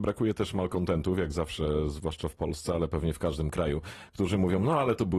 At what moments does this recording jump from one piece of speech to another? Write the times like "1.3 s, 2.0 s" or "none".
none